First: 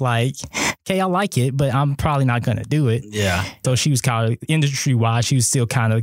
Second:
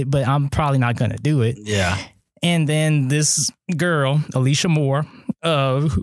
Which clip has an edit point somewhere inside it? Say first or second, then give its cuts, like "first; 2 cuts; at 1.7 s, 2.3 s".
first; 1 cut; at 3.6 s